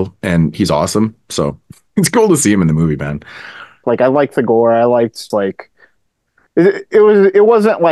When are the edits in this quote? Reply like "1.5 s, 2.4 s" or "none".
3.8 s, 5.3 s